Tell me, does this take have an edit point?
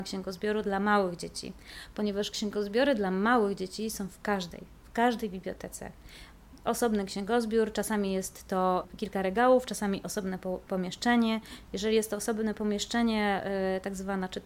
no; 0 cuts

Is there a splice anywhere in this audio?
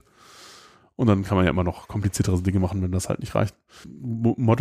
no; 0 cuts

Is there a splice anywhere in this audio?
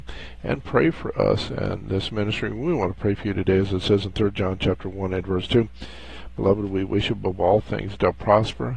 no; 0 cuts

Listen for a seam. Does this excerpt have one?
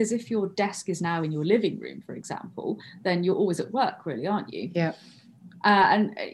no; 0 cuts

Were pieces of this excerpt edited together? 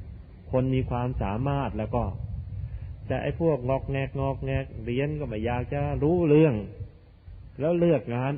no; 0 cuts

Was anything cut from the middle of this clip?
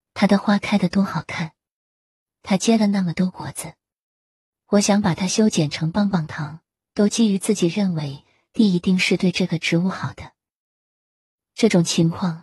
yes; 1 cut; at 6.8 s

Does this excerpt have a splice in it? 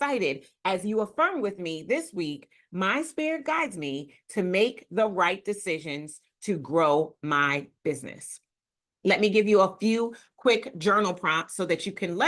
no; 0 cuts

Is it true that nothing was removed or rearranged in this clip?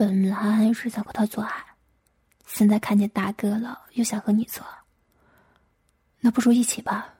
yes; 0 cuts

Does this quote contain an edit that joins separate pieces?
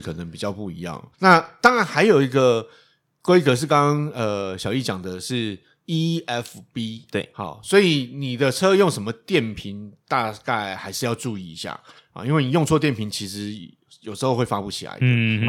yes; 1 cut; at 1.1 s

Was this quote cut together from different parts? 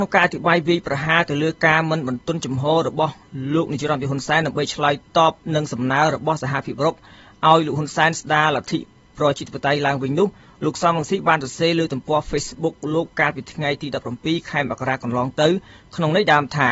no; 0 cuts

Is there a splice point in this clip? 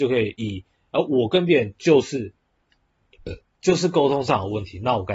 no; 0 cuts

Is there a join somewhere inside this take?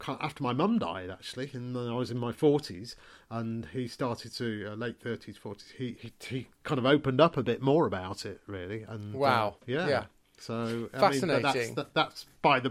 yes; 2 cuts; at 5.9 s, 9.6 s

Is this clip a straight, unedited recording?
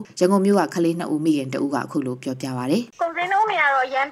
no; 1 cut; at 2.9 s

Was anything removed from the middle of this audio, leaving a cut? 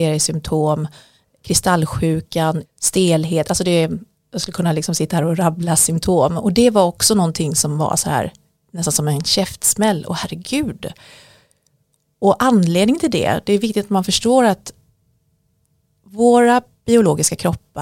yes; 1 cut; at 2.7 s

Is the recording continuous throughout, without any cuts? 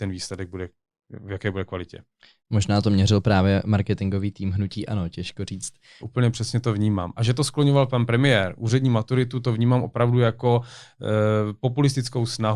no; 1 cut; at 6.0 s

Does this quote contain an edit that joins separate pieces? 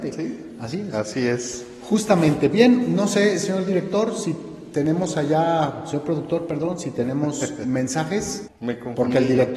yes; 2 cuts; at 2.5 s, 8.4 s

